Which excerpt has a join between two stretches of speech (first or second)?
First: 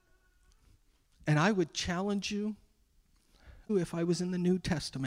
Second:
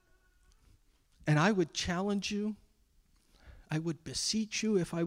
first